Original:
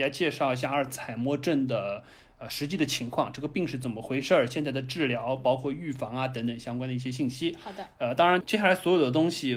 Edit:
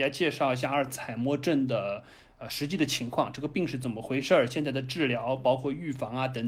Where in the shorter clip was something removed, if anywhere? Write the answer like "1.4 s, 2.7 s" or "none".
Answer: none